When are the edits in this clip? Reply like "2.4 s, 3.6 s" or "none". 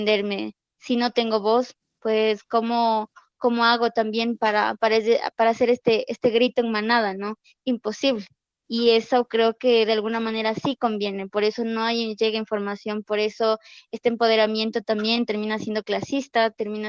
none